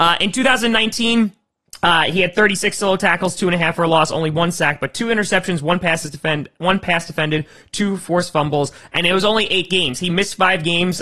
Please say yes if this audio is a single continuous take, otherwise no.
yes